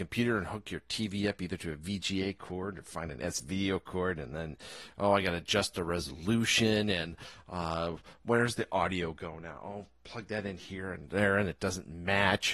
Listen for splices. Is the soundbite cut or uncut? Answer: uncut